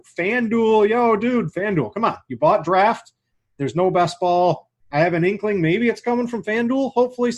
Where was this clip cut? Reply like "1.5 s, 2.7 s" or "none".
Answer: none